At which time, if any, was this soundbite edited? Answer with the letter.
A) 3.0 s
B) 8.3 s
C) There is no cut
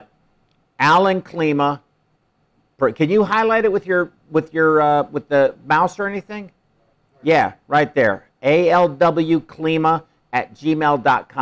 C